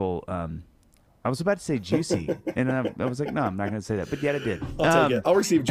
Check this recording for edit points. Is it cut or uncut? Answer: uncut